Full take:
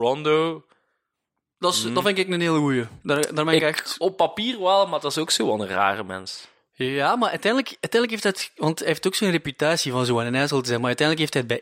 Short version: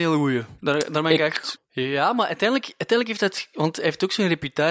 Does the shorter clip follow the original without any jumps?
no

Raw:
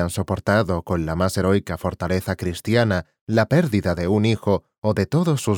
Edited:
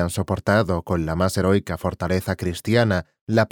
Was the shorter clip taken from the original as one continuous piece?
yes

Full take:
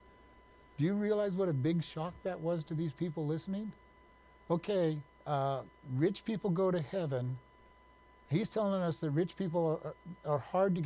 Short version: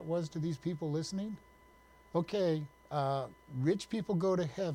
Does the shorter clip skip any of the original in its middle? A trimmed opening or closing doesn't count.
no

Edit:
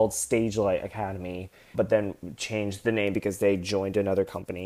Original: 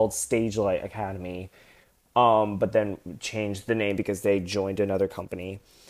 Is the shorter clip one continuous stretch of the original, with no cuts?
no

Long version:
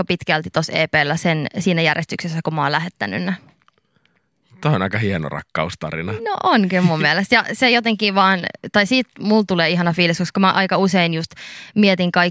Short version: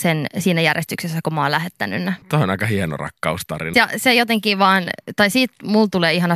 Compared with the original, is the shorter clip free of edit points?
no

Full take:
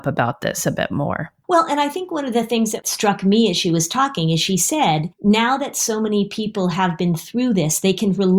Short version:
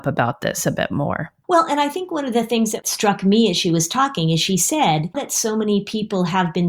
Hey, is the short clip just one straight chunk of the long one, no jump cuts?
no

